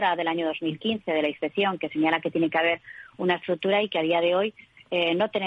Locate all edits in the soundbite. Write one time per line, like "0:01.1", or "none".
none